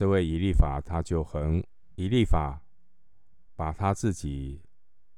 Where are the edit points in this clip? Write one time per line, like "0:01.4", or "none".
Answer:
0:01.9